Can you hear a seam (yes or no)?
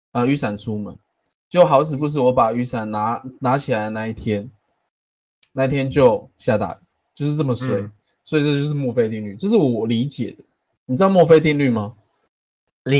yes